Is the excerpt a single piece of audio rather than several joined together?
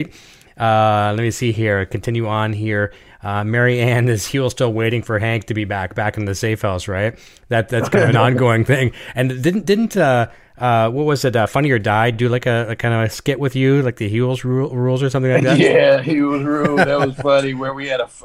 yes; 0 cuts

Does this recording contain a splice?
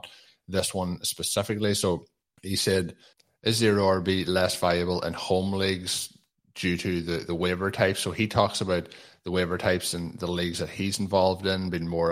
no; 0 cuts

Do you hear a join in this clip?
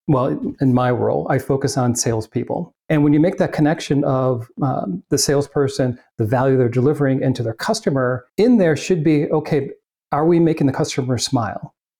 yes; 2 cuts; at 2.8 s, 8.3 s

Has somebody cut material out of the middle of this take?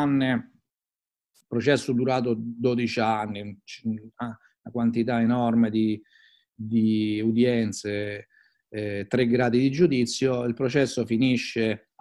no; 0 cuts

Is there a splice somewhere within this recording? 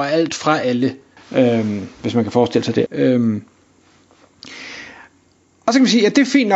yes; 2 cuts; at 1.2 s, 2.9 s

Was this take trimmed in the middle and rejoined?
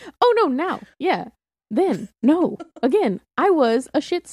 no; 0 cuts

